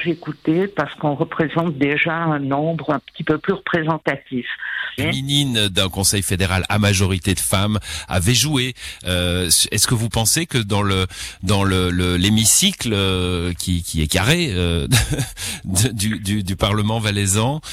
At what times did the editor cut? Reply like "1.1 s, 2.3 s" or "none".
5.0 s